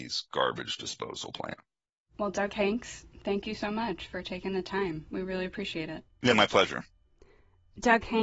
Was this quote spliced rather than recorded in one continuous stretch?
no; 0 cuts

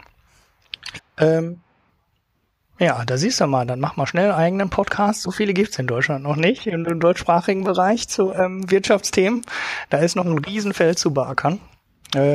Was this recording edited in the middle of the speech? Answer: yes; 1 cut; at 1.0 s

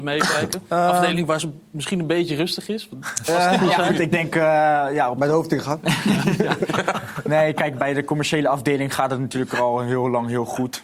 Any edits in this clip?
yes; 2 cuts; at 3.7 s, 7.8 s

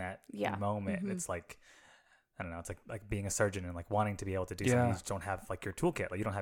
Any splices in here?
no; 0 cuts

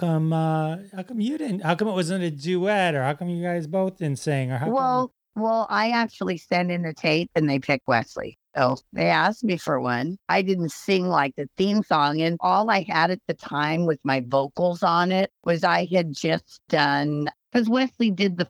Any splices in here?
yes; 2 cuts; at 10.2 s, 12.4 s

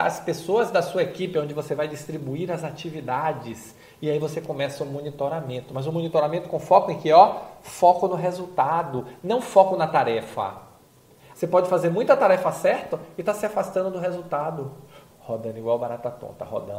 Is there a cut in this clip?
yes; 2 cuts; at 11.3 s, 15.1 s

